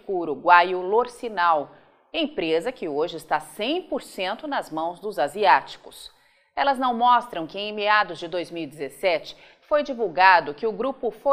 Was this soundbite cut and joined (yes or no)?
no